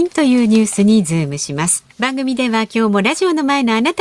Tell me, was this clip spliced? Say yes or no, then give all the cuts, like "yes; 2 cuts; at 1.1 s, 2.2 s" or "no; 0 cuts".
yes; 1 cut; at 1.9 s